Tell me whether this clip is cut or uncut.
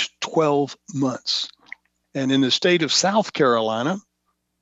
cut